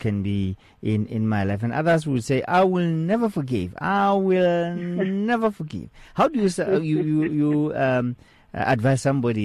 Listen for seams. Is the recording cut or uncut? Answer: uncut